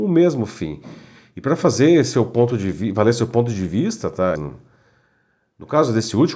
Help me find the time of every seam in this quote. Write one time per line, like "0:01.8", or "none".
0:04.4